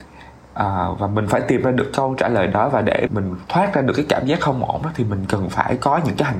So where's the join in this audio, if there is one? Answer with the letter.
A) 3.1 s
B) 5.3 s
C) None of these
A